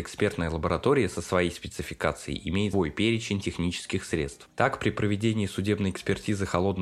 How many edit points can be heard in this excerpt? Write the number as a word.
one